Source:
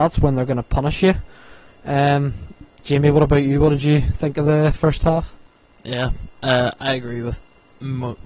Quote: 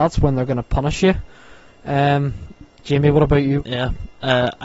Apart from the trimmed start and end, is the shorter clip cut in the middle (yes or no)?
yes